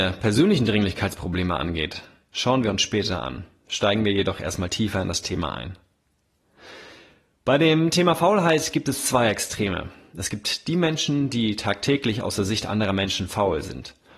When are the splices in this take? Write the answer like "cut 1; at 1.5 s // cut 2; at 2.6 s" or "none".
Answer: none